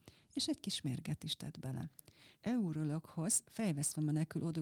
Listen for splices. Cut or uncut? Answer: cut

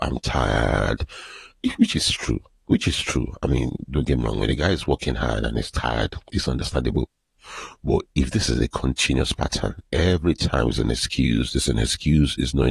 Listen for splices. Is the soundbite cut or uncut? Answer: uncut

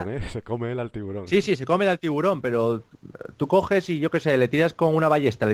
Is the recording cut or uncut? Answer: uncut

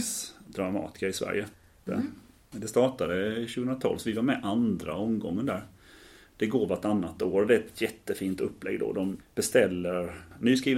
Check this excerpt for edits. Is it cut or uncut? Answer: cut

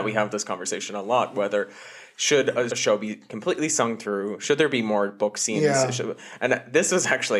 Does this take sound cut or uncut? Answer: cut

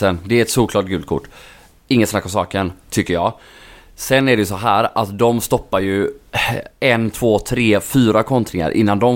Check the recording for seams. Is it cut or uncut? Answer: uncut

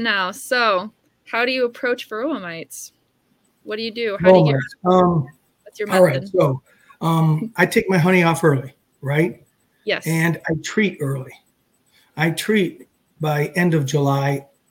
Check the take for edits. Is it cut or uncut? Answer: uncut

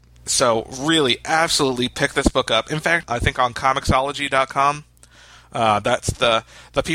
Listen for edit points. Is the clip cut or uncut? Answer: cut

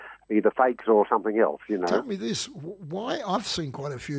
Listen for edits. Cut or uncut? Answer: uncut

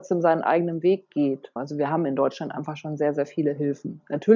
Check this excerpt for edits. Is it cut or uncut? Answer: cut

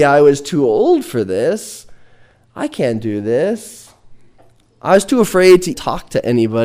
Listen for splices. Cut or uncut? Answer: cut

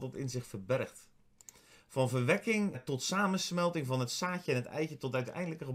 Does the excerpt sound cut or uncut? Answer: cut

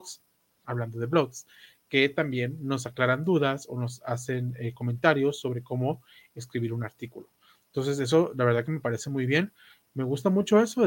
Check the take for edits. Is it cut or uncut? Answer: uncut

